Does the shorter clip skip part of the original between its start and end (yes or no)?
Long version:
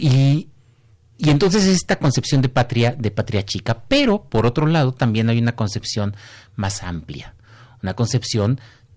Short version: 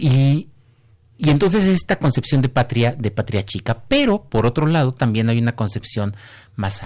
no